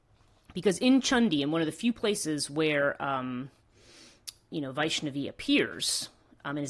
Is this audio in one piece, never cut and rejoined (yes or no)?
no